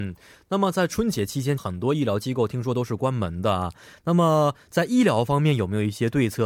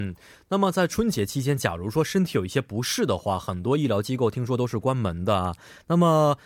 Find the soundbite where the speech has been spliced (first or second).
first